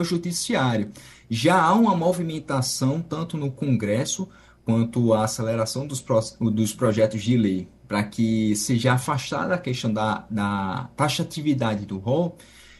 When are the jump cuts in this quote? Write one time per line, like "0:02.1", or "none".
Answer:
none